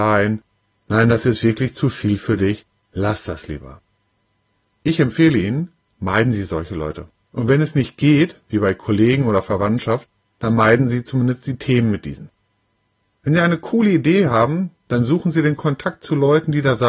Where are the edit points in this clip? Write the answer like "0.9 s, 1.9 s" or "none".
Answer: none